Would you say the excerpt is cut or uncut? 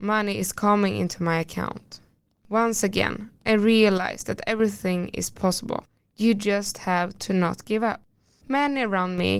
uncut